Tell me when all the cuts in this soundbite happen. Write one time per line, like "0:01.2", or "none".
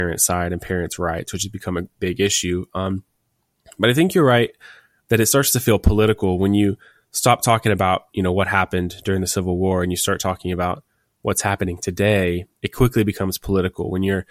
none